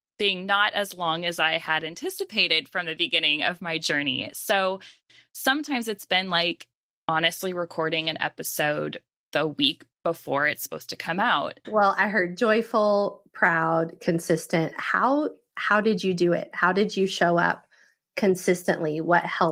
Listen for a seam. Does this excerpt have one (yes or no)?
yes